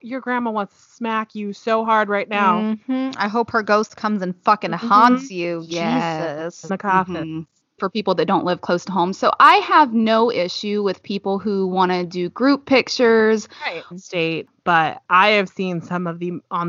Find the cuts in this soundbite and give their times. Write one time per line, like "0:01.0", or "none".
0:06.7
0:07.8
0:13.9